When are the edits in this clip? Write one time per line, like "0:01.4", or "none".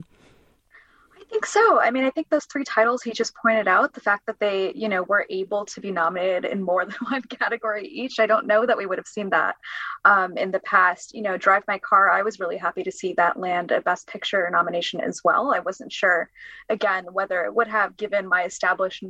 none